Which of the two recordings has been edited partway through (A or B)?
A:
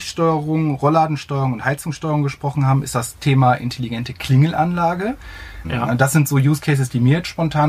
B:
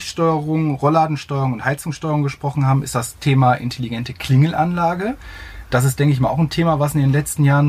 A